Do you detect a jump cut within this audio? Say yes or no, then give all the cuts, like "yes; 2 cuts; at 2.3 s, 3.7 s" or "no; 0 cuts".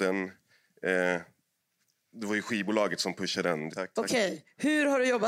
yes; 1 cut; at 3.7 s